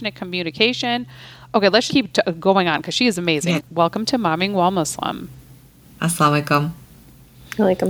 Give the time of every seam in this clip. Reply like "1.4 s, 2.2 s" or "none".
1.9 s, 3.6 s